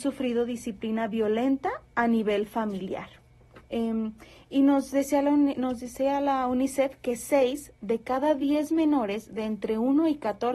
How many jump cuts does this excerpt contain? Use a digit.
1